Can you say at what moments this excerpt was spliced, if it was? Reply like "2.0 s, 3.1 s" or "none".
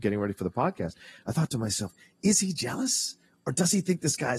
none